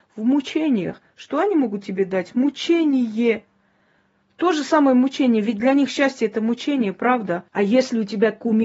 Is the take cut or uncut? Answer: cut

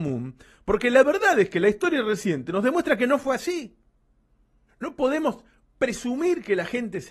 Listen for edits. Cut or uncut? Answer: cut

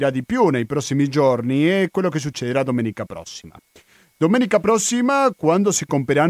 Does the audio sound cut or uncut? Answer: uncut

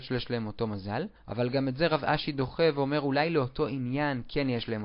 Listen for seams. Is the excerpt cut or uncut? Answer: uncut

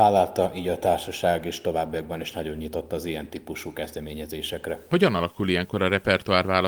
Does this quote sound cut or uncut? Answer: uncut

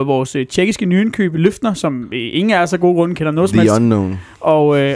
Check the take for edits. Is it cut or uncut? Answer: cut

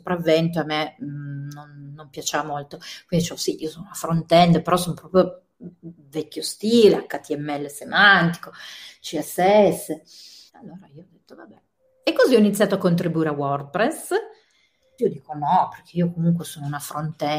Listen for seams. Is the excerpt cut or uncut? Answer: cut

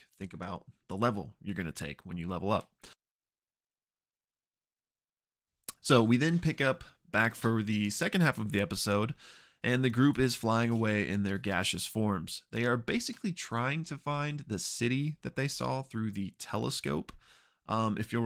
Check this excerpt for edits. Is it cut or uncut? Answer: uncut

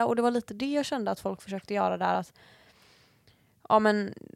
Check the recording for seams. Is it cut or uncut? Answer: uncut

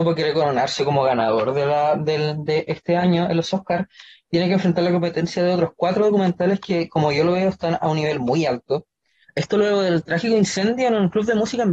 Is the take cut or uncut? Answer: cut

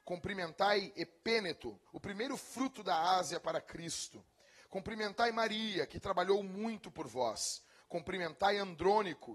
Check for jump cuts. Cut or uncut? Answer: cut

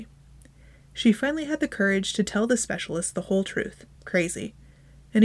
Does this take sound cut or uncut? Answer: cut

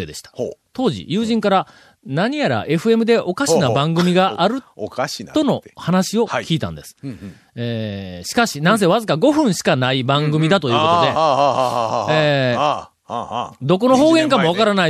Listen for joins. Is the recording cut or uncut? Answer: uncut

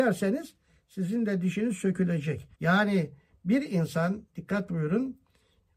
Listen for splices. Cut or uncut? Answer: cut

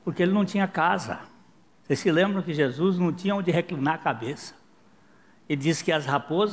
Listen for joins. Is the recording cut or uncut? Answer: uncut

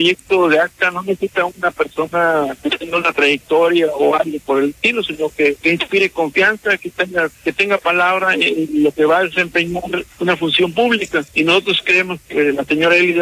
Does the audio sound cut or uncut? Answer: uncut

